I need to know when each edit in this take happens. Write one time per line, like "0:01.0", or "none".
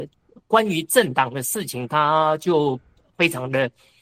none